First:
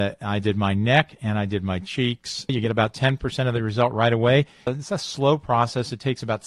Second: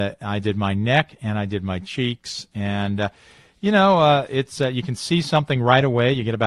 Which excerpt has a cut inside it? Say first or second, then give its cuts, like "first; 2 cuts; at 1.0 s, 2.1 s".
first; 2 cuts; at 2.5 s, 4.7 s